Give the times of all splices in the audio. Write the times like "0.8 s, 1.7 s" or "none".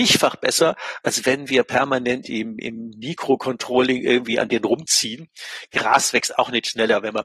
none